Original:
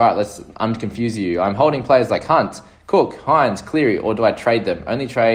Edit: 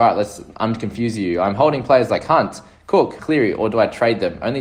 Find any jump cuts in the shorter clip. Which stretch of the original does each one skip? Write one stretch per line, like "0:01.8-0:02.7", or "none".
0:03.2-0:03.6